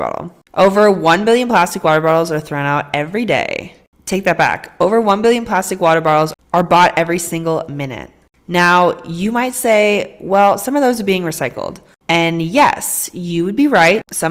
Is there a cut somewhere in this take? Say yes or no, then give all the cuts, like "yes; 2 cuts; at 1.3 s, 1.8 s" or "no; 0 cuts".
no; 0 cuts